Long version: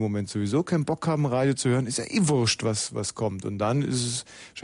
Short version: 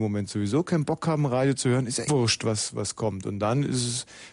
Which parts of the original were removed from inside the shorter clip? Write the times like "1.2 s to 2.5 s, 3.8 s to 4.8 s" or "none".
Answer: 2.1 s to 2.3 s